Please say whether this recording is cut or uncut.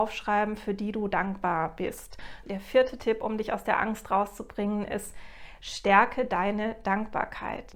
cut